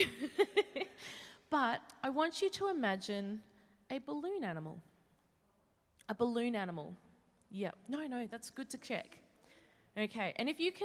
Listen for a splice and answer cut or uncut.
uncut